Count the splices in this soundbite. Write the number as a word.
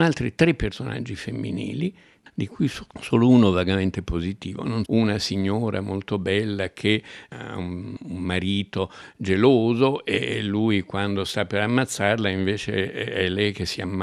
one